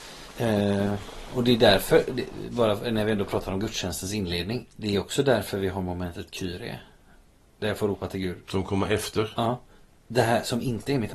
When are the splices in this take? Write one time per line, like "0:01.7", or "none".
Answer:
none